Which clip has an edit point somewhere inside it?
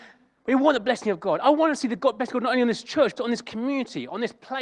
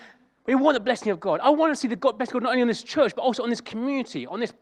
first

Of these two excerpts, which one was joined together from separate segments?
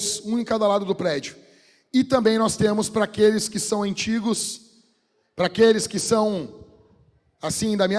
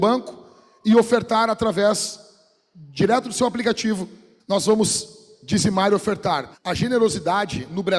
second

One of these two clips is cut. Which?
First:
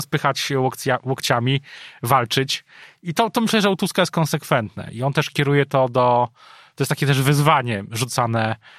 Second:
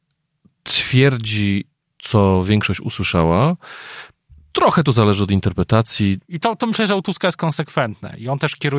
second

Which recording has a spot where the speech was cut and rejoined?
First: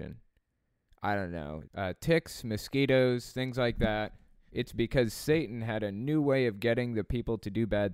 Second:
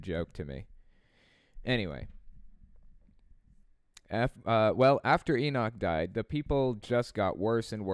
first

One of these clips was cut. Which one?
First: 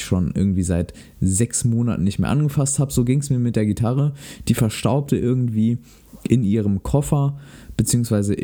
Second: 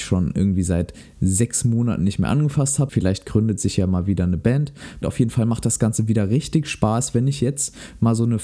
second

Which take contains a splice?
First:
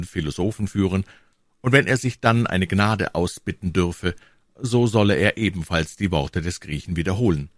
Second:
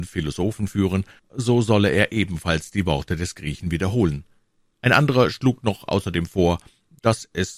second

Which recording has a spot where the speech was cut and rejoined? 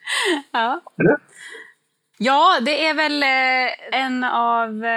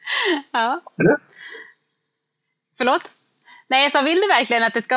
first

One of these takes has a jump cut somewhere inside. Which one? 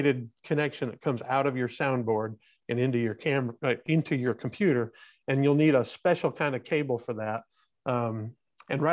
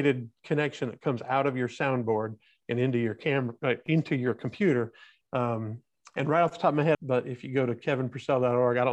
second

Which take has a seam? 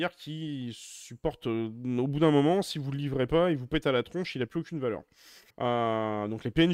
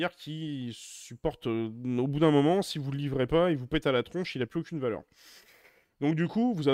first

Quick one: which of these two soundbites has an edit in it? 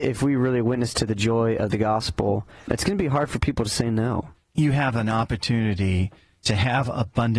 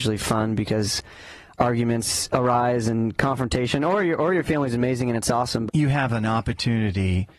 second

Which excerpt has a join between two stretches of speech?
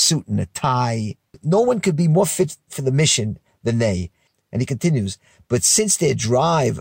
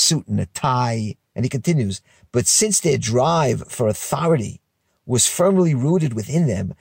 second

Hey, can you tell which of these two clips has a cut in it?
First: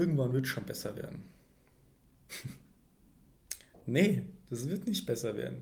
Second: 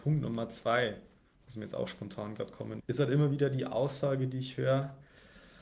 second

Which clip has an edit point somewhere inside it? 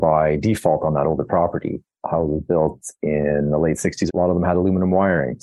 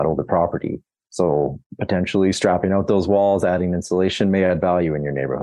first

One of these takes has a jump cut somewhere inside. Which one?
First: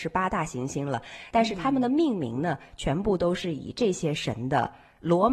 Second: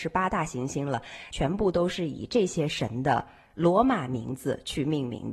second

